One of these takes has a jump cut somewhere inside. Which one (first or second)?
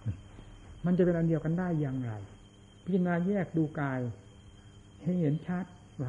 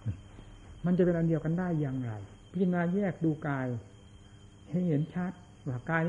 second